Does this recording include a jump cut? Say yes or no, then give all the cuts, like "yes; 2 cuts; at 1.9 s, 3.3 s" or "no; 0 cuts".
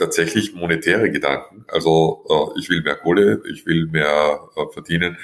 no; 0 cuts